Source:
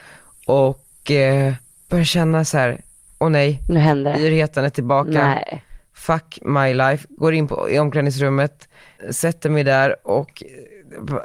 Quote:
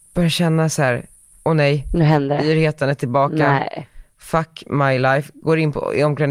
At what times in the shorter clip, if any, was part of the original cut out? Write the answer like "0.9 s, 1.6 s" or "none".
none